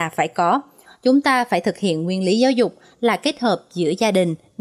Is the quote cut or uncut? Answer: uncut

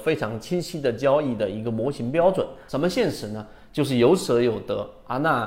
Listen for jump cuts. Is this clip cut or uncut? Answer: cut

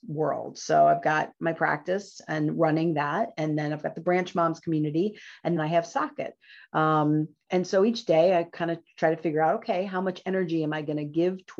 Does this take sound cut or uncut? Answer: cut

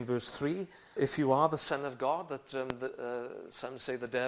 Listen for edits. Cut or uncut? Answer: cut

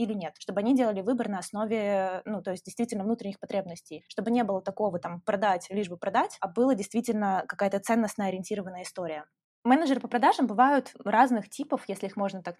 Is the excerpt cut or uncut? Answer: uncut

